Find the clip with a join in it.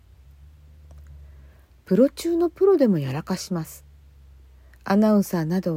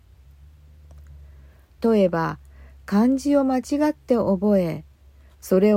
second; 1 cut; at 1.8 s

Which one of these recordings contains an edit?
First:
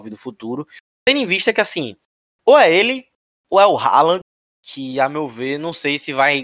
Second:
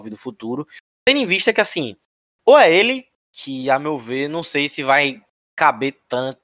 second; 1 cut; at 3.2 s

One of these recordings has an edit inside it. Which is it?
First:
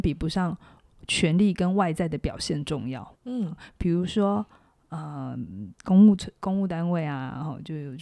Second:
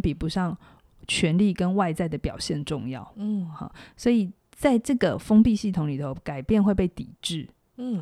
first; 1 cut; at 3.1 s

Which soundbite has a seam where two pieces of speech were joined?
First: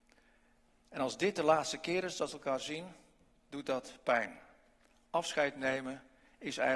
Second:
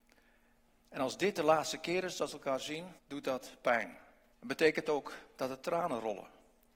second; 2 cuts; at 3.0 s, 4.3 s

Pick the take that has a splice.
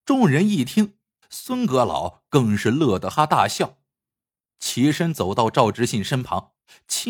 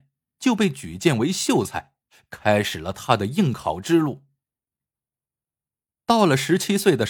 first; 2 cuts; at 1.2 s, 3.1 s

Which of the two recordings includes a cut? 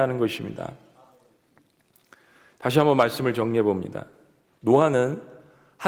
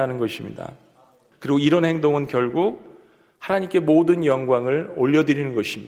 second; 1 cut; at 1.3 s

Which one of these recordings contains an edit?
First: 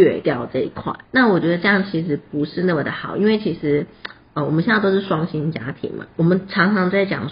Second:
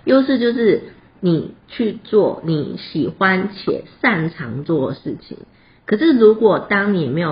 first; 2 cuts; at 1.0 s, 6.1 s

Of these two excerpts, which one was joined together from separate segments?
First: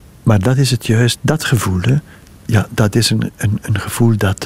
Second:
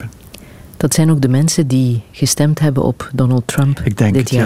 first; 1 cut; at 1.2 s

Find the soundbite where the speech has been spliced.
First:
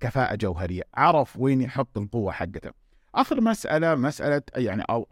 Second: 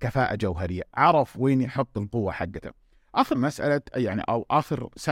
second; 1 cut; at 3.3 s

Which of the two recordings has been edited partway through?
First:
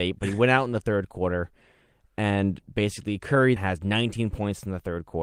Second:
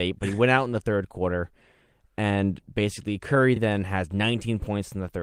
first; 1 cut; at 3.6 s

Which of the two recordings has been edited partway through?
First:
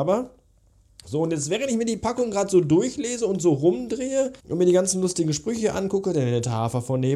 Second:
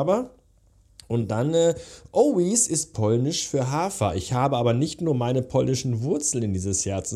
first; 2 cuts; at 1.0 s, 4.4 s

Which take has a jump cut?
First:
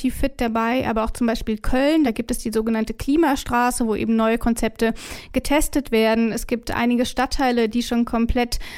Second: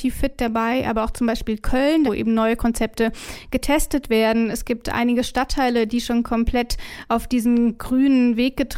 second; 1 cut; at 2.1 s

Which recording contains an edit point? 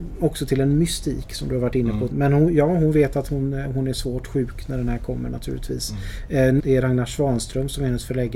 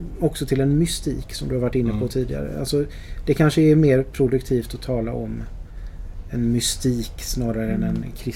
first; 2 cuts; at 2.1 s, 6.6 s

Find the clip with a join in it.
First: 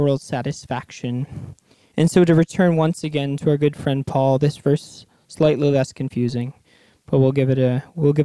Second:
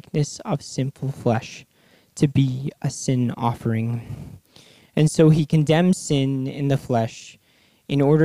first; 1 cut; at 1.9 s

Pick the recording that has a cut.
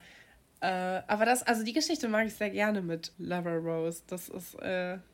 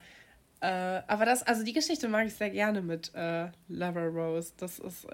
first; 1 cut; at 3.1 s

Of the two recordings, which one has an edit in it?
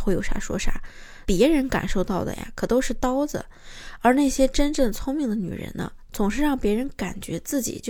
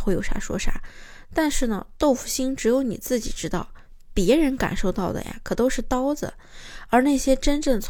first; 1 cut; at 1.3 s

